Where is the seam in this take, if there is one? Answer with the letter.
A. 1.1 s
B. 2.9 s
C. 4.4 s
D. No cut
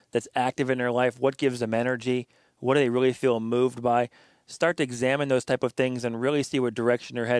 D